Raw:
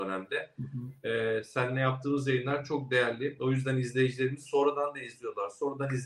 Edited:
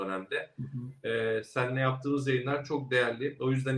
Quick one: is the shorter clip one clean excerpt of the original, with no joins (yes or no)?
yes